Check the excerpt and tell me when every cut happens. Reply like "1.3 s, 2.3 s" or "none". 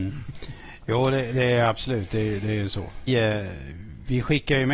3.1 s

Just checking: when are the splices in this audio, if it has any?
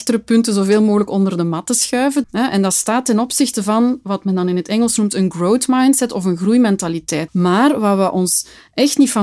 2.2 s, 7.3 s

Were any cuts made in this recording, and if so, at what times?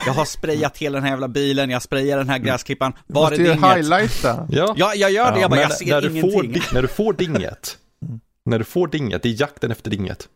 8.0 s

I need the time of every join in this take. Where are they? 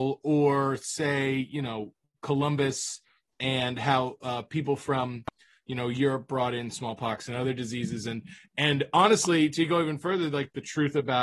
none

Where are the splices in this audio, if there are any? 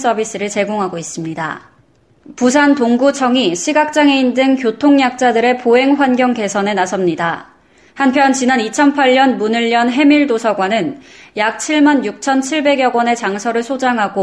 7.9 s

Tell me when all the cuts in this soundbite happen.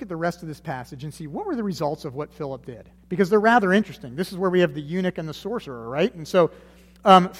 3.0 s

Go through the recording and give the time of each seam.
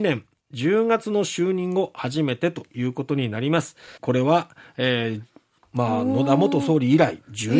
4.0 s, 5.6 s

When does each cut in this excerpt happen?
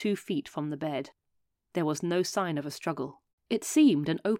3.3 s

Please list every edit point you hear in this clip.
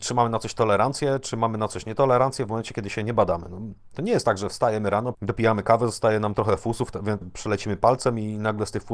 5.1 s, 7.2 s

